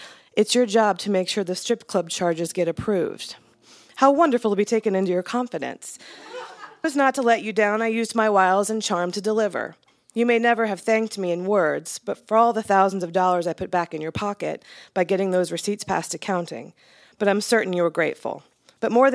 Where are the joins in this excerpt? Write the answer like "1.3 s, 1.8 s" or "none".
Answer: 6.8 s